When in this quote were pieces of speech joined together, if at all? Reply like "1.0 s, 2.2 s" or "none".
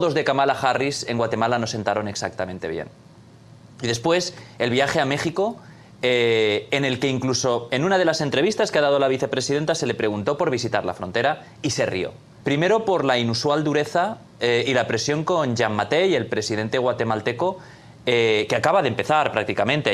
12.4 s